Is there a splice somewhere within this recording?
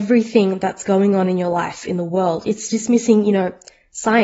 no; 0 cuts

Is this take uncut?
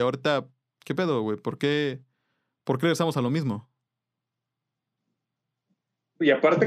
yes; 0 cuts

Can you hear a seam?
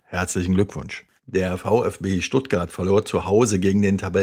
yes; 1 cut; at 1.2 s

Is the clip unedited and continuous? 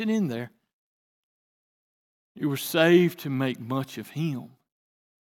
no; 1 cut; at 2.1 s

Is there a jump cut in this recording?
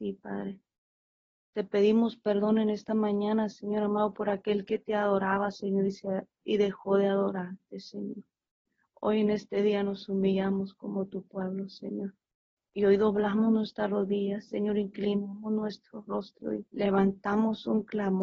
yes; 2 cuts; at 12.6 s, 16.7 s

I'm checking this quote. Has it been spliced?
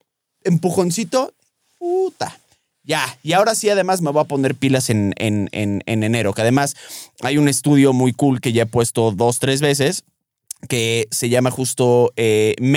no; 0 cuts

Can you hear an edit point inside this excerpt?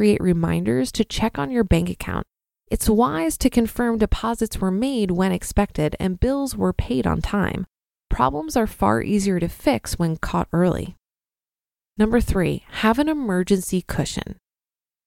no; 0 cuts

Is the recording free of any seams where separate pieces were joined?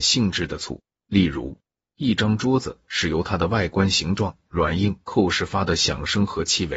yes; 0 cuts

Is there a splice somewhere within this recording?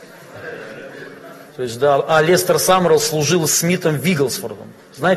yes; 1 cut; at 1.5 s

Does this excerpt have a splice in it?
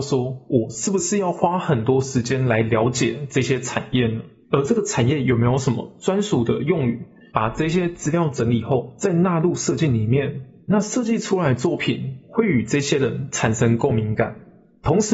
yes; 1 cut; at 4.4 s

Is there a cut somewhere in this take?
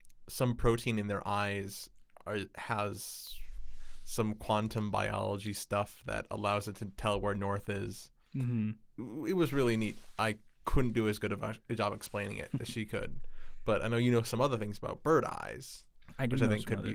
no; 0 cuts

